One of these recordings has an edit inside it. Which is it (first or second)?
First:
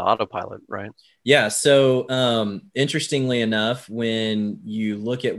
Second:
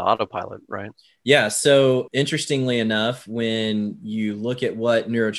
second